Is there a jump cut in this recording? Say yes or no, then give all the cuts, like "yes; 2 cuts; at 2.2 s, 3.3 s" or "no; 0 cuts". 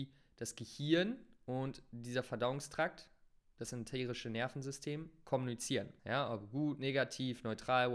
yes; 1 cut; at 6.0 s